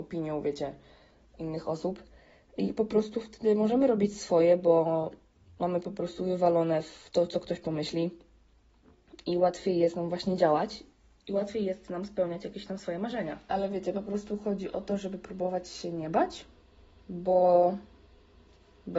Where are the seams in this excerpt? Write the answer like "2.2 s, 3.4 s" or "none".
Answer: none